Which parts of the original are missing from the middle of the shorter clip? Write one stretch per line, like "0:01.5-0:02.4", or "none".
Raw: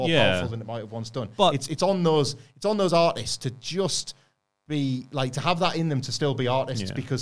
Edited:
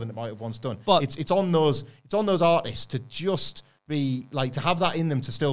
0:04.3-0:04.6